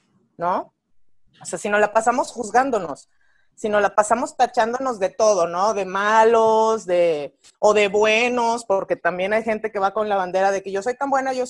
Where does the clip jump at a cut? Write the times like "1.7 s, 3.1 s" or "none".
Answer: none